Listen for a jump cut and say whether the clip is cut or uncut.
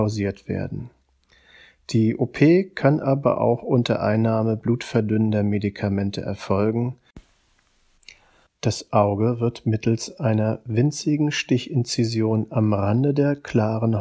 cut